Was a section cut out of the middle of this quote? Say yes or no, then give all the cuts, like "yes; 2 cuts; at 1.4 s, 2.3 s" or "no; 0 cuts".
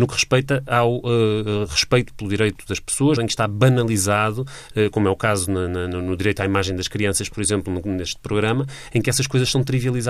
yes; 1 cut; at 3.2 s